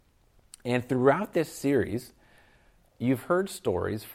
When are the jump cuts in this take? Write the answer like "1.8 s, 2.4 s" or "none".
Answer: 2.8 s